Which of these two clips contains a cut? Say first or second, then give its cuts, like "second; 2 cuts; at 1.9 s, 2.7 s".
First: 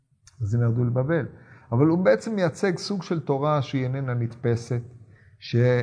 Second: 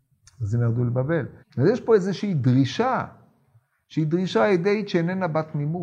second; 1 cut; at 1.4 s